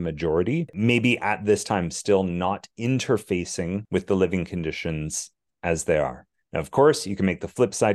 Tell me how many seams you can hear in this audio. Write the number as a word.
zero